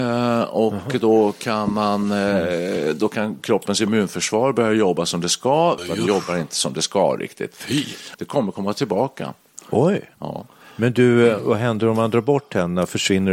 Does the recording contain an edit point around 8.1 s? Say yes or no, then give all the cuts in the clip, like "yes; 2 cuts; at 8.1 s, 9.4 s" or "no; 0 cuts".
yes; 2 cuts; at 5.8 s, 8.1 s